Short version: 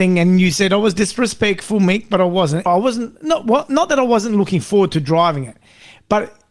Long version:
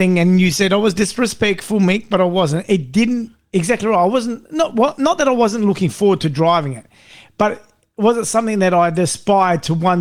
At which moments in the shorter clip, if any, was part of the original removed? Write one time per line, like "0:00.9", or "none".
0:02.7